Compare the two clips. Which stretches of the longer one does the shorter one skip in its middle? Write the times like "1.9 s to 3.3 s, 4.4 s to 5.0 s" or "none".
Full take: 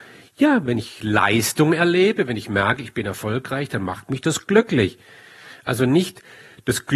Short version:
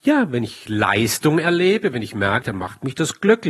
2.8 s to 3.7 s